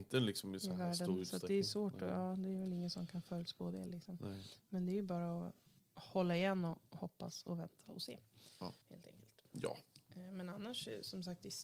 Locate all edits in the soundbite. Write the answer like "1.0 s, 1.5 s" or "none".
5.8 s, 8.8 s